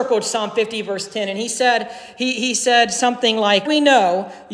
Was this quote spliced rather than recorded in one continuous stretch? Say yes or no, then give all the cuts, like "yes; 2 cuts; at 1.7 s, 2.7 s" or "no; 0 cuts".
yes; 1 cut; at 3.7 s